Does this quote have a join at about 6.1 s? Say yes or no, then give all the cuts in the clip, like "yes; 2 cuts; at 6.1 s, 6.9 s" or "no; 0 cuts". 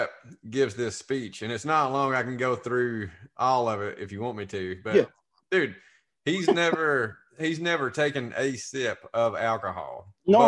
yes; 1 cut; at 6.1 s